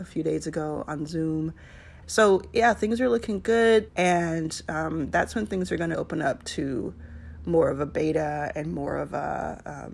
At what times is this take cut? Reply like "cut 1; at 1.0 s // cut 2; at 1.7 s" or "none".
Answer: cut 1; at 2.0 s // cut 2; at 3.9 s // cut 3; at 5.9 s